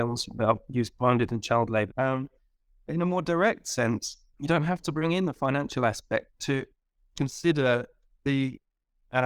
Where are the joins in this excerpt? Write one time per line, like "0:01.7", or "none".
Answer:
0:01.9